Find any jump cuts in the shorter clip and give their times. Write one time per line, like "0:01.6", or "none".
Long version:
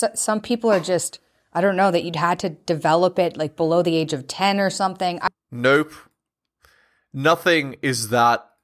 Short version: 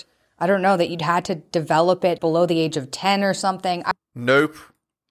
0:02.2